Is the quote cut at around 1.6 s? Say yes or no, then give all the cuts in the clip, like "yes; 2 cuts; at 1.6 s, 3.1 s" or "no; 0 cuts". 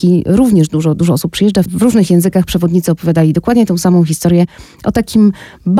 yes; 1 cut; at 1.6 s